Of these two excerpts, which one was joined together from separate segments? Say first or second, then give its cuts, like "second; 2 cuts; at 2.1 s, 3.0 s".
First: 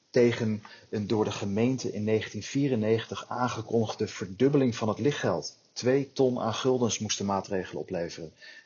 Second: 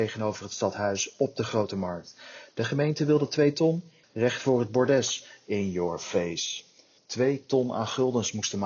second; 2 cuts; at 4.0 s, 7.0 s